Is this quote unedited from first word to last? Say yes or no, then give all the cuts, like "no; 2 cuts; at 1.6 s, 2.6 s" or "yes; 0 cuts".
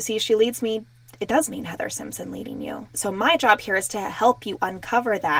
no; 1 cut; at 2.9 s